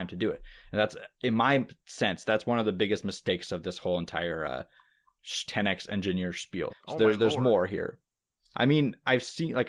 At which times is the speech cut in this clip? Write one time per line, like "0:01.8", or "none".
0:05.5
0:06.7
0:08.5